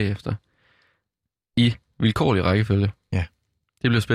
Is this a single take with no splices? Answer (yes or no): yes